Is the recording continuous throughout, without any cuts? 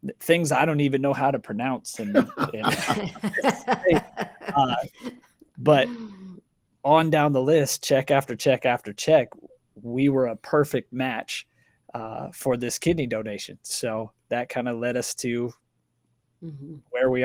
yes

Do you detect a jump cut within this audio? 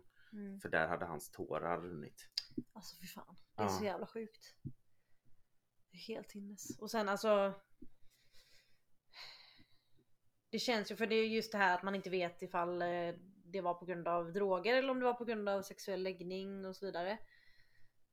no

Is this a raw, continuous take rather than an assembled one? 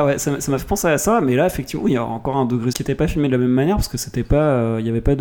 no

